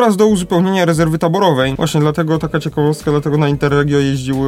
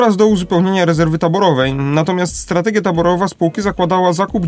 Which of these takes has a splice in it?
first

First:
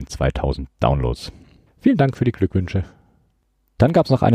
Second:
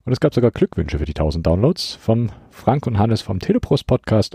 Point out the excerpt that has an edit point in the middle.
first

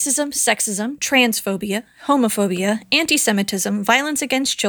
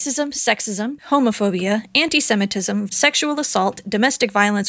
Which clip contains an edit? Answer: second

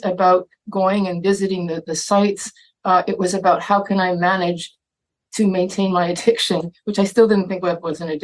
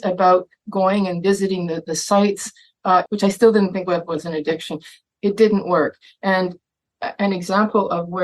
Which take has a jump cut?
second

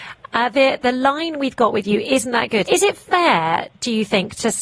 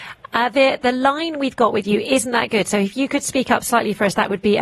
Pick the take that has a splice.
first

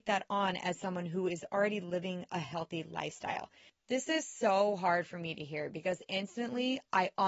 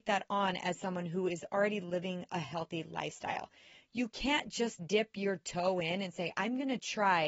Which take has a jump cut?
first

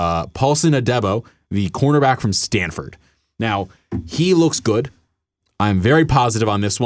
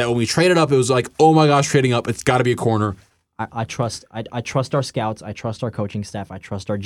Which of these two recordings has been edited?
second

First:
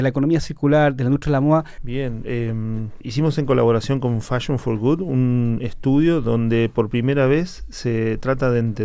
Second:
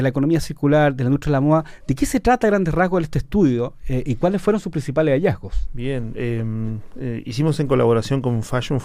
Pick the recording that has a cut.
first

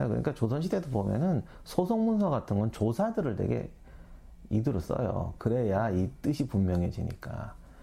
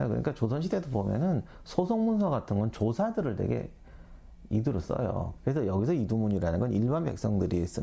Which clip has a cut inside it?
second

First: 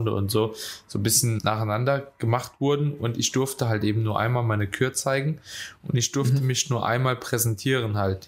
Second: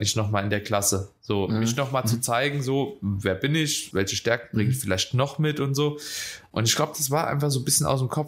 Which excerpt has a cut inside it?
second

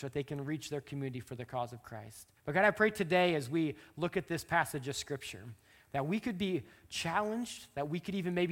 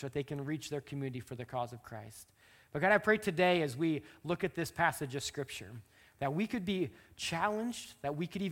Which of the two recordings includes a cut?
first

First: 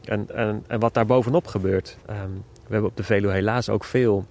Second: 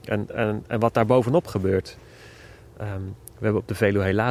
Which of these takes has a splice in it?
first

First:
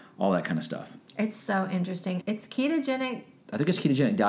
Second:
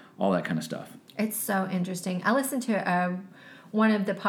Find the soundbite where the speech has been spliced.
first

